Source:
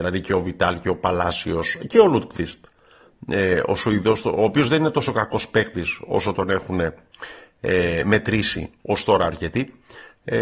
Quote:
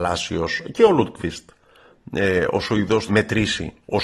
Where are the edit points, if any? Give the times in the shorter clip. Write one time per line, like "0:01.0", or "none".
0:03.1